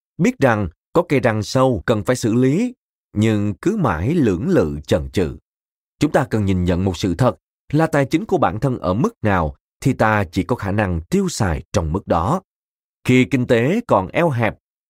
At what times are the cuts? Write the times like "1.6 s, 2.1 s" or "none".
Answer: 5.8 s